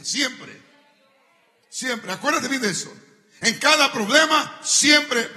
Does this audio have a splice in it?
no; 0 cuts

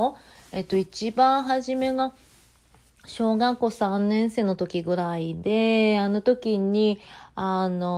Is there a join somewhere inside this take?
no; 0 cuts

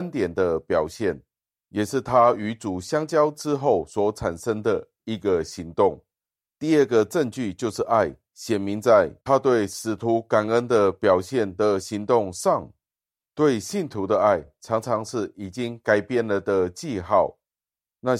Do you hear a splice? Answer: no; 0 cuts

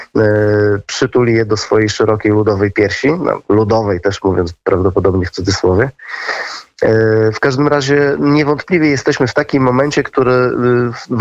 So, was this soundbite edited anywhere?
no; 0 cuts

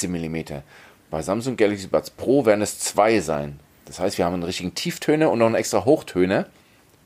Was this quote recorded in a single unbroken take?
yes; 0 cuts

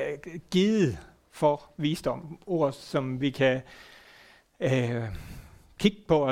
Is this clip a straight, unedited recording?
yes; 0 cuts

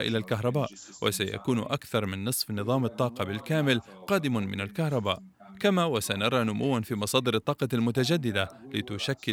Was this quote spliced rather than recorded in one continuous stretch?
no; 0 cuts

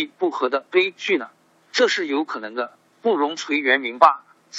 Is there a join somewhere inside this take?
yes; 1 cut; at 2.9 s

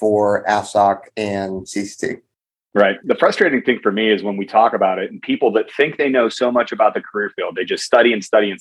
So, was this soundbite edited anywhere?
no; 0 cuts

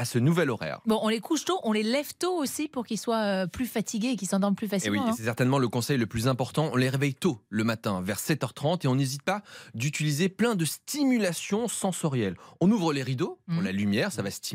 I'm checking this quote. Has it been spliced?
no; 0 cuts

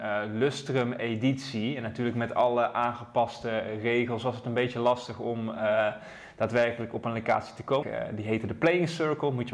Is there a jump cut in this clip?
yes; 1 cut; at 7.8 s

